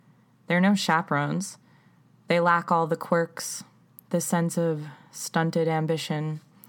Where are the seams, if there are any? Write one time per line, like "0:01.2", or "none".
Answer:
none